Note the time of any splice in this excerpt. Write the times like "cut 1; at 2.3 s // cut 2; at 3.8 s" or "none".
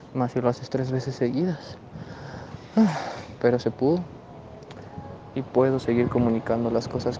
cut 1; at 5.3 s